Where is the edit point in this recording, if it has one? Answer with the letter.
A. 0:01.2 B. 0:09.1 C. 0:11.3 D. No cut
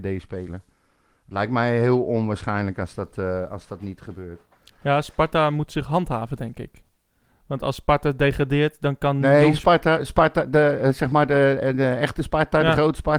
D